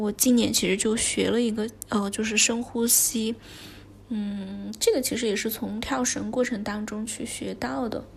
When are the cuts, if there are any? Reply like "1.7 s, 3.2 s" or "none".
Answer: none